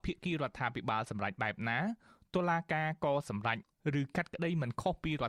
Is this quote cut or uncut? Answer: uncut